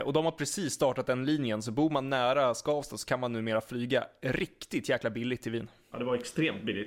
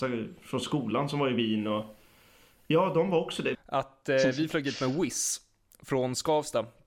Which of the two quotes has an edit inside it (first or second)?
second